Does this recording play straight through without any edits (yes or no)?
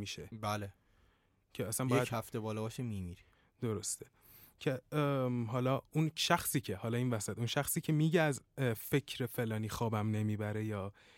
yes